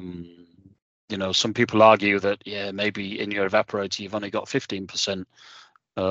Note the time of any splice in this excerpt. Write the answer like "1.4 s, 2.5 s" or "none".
none